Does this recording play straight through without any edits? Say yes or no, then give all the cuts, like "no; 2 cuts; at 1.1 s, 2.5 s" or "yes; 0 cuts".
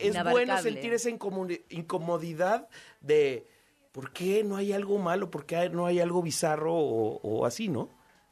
yes; 0 cuts